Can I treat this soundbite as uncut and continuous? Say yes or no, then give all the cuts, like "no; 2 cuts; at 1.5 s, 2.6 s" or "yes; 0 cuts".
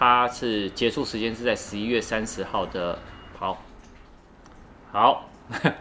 no; 1 cut; at 3.3 s